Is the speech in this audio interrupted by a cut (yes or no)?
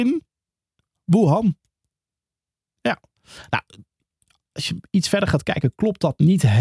no